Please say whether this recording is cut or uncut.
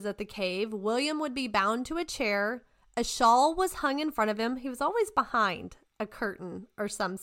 uncut